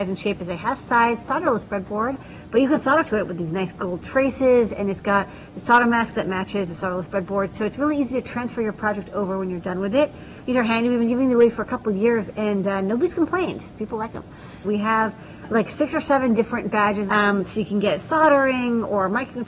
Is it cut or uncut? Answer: cut